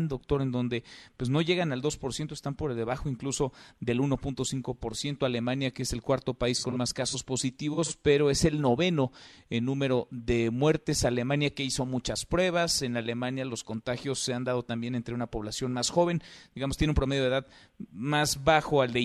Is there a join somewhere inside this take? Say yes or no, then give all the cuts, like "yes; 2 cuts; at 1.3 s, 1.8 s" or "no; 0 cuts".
no; 0 cuts